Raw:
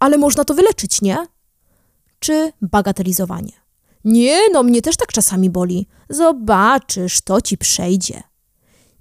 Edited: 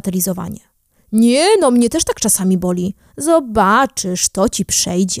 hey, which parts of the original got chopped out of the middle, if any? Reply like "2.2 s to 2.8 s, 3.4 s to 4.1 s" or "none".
none